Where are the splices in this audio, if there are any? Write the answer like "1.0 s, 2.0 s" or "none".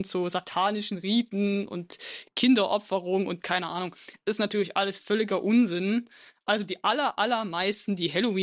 none